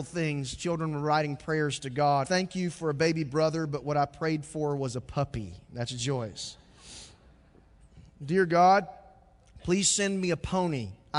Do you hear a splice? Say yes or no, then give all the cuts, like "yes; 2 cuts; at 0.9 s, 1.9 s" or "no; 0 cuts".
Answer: yes; 1 cut; at 2.2 s